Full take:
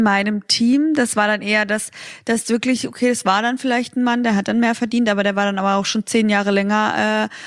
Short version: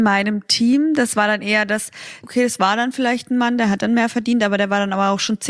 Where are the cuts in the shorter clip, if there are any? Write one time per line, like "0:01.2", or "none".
0:02.2